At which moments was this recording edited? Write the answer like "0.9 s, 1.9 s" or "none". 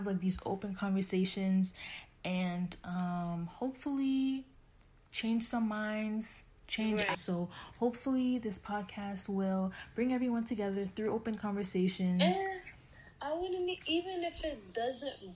7.1 s